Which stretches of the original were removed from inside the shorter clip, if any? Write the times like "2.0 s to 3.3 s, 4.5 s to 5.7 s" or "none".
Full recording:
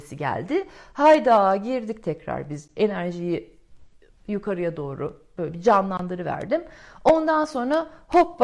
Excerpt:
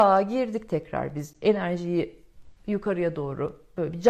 3.9 s to 4.2 s